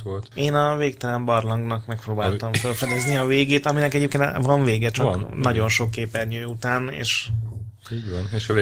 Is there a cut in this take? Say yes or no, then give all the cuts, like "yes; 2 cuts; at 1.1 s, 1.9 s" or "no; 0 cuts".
no; 0 cuts